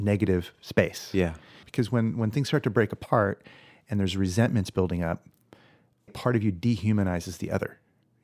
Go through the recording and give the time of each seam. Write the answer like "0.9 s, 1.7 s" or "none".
1.6 s, 6.1 s